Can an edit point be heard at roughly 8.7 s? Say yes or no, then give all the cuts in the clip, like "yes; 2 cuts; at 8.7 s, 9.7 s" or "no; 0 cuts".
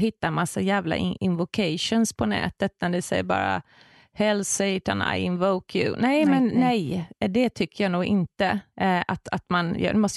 yes; 1 cut; at 8.7 s